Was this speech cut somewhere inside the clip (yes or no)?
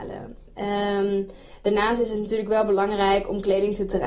no